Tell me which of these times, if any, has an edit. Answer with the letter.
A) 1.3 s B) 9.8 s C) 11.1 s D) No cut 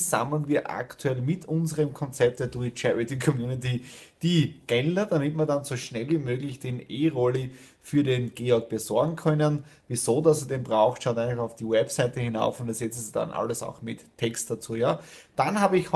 D